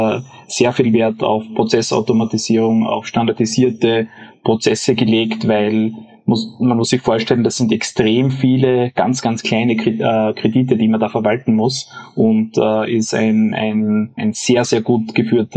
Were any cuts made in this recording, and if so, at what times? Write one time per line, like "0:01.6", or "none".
0:14.2